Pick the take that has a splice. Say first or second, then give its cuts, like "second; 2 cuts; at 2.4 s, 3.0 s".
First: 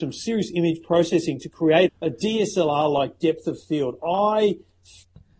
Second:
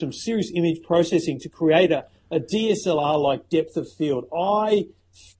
first; 1 cut; at 1.9 s